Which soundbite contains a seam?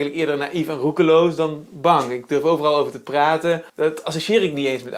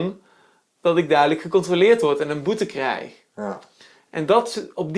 first; 1 cut; at 3.7 s

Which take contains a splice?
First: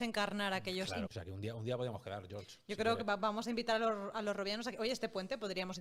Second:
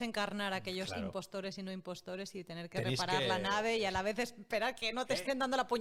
first; 1 cut; at 1.1 s

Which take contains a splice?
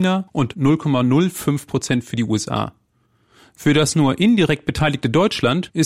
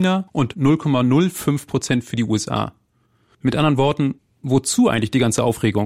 second; 1 cut; at 3.3 s

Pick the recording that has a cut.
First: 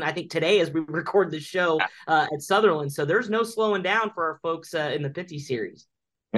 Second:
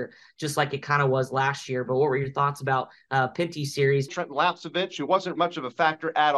second; 2 cuts; at 4.1 s, 5.4 s

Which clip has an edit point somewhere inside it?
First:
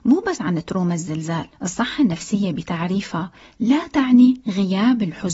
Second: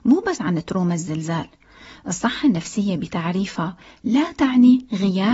first; 1 cut; at 1.5 s

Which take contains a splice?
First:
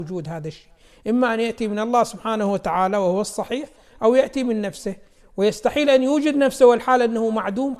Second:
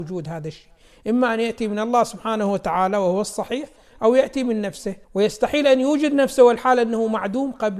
second; 1 cut; at 5.0 s

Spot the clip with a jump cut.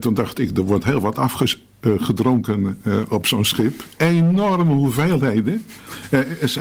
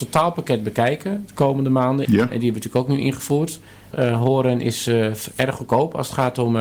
second; 2 cuts; at 2.0 s, 3.9 s

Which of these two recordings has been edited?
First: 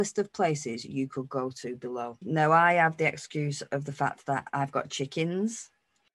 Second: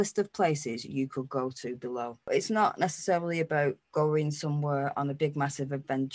first; 1 cut; at 2.2 s

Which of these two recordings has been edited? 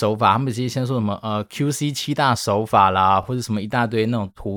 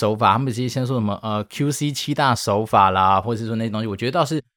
second; 1 cut; at 3.2 s

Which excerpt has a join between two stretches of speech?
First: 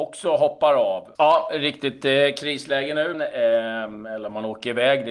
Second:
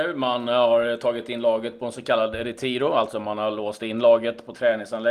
first; 2 cuts; at 1.2 s, 3.1 s

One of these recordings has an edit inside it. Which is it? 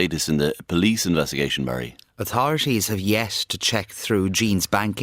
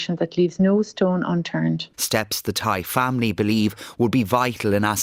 second; 1 cut; at 1.9 s

